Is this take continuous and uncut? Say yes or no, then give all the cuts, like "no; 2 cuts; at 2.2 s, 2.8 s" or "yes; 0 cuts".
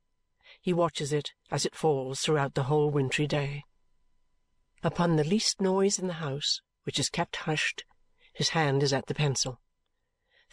yes; 0 cuts